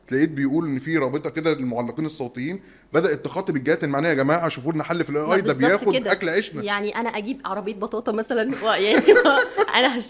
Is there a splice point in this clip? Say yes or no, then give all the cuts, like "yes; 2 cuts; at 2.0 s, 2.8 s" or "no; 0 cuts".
no; 0 cuts